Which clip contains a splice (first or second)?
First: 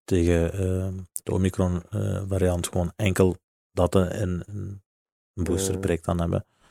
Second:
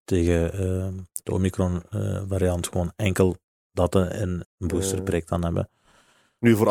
second